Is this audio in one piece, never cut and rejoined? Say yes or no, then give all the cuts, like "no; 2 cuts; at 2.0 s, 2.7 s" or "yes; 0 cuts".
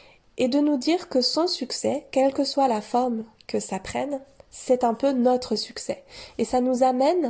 yes; 0 cuts